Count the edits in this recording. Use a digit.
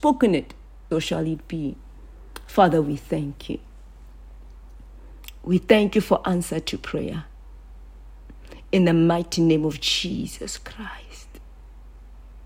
1